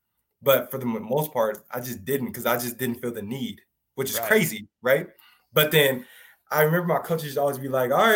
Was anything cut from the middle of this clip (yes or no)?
no